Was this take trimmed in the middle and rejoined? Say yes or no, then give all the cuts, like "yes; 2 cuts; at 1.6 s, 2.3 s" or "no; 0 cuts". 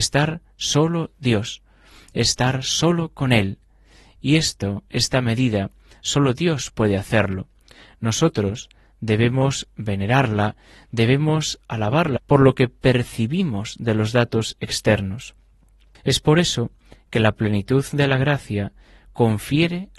yes; 2 cuts; at 12.2 s, 15.9 s